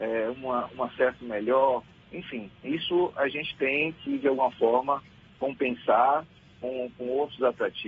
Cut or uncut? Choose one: cut